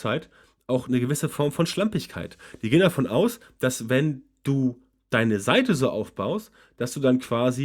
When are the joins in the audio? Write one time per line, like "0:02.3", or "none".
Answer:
none